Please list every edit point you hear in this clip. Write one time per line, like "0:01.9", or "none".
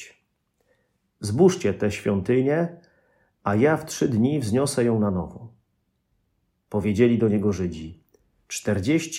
none

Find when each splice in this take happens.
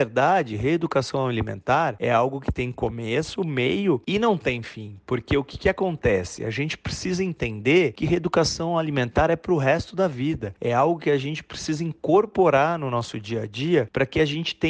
none

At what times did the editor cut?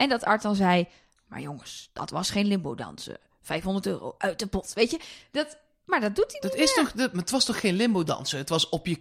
none

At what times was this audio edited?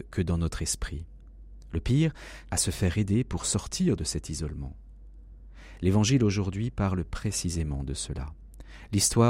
0:02.5

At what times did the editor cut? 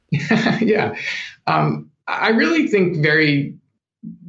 none

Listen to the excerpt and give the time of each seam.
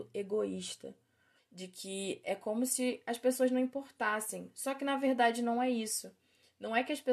0:01.4

